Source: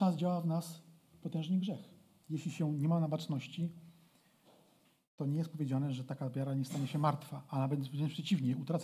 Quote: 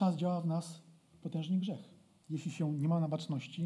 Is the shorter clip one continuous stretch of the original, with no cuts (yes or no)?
yes